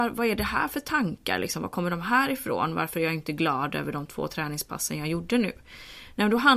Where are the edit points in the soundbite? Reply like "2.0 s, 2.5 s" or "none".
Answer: none